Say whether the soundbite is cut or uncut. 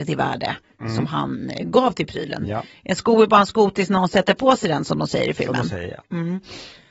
uncut